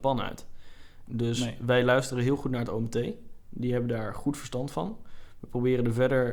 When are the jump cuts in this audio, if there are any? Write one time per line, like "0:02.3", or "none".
0:01.1